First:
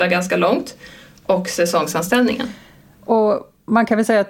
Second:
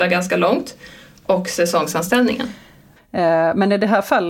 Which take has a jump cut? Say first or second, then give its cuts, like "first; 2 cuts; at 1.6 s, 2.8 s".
second; 1 cut; at 3.0 s